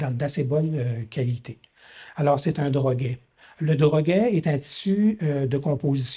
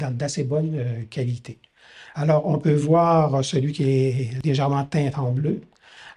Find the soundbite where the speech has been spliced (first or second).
first